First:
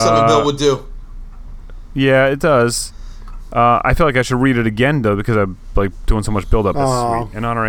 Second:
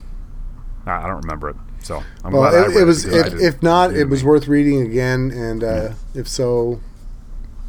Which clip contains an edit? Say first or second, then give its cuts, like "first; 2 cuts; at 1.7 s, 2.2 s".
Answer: first; 1 cut; at 6.7 s